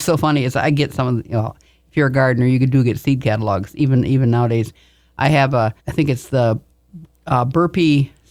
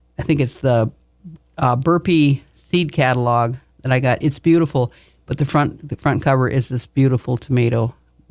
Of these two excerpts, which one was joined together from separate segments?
first; 1 cut; at 5.8 s

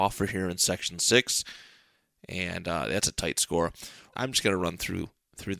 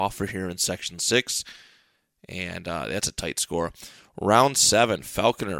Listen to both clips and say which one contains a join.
first; 1 cut; at 4.1 s

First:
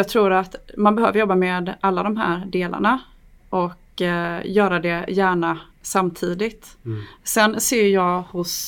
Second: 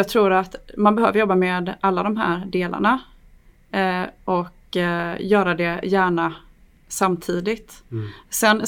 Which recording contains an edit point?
first; 2 cuts; at 3.4 s, 5.7 s

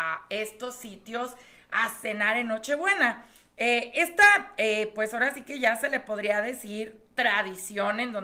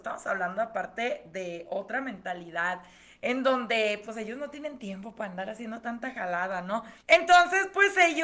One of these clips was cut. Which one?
second; 1 cut; at 7.0 s

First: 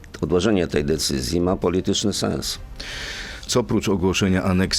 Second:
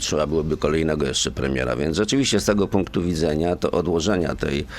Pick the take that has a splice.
first; 1 cut; at 3.5 s

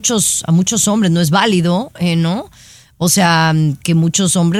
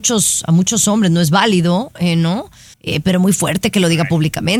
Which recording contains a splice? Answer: second; 1 cut; at 2.7 s

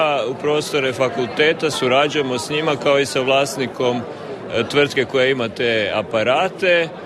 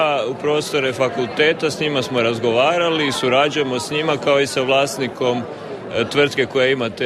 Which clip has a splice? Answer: first; 1 cut; at 1.7 s

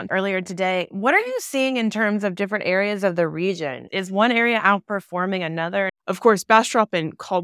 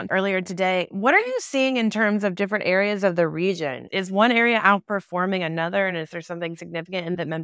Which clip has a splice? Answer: first; 1 cut; at 5.9 s

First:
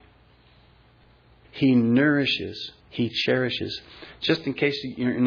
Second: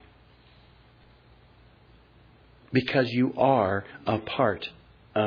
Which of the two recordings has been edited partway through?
first; 2 cuts; at 1.4 s, 2.8 s

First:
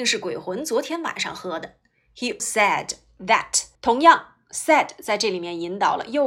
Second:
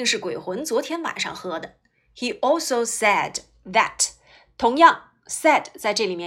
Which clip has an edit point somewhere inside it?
first; 2 cuts; at 2.4 s, 3.8 s

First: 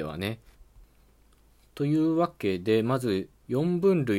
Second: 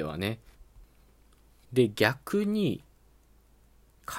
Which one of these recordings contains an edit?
second; 1 cut; at 1.6 s

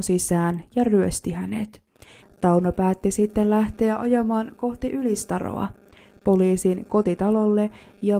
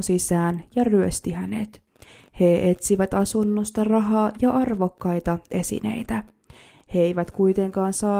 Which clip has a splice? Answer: first; 1 cut; at 2.2 s

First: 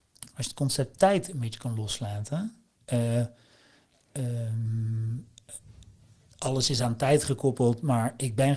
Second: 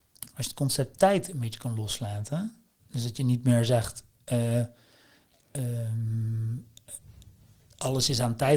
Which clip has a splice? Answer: first; 1 cut; at 2.8 s

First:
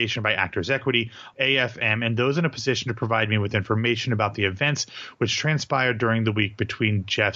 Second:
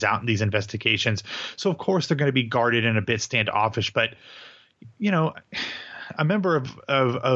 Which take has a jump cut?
first; 1 cut; at 1.3 s

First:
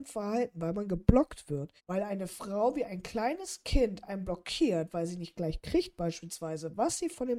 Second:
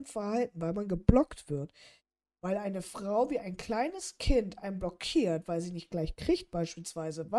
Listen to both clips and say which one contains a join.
first; 1 cut; at 1.8 s

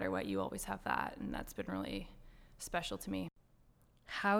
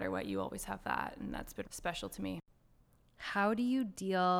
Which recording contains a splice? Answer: second; 1 cut; at 1.6 s

